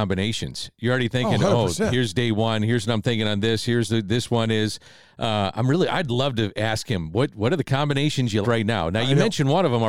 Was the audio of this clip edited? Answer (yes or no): yes